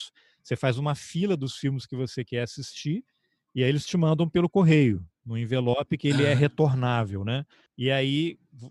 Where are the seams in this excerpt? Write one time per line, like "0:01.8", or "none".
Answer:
none